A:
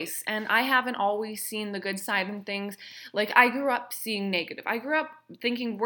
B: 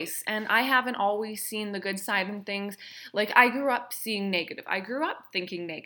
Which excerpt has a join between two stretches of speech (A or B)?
A